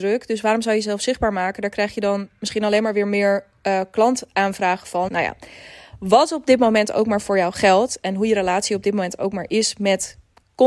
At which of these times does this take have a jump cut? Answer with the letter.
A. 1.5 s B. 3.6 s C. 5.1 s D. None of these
C